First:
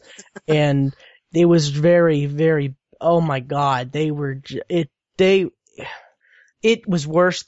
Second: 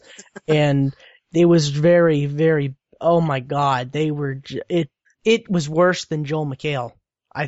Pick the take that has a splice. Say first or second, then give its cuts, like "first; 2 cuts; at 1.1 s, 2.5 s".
second; 1 cut; at 5.1 s